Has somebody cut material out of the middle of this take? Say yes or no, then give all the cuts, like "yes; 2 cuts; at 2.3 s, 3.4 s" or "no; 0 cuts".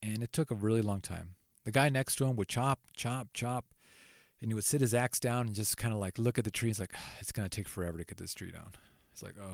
no; 0 cuts